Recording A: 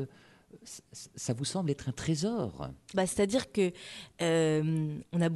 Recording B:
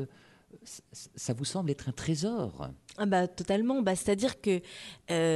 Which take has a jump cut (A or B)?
A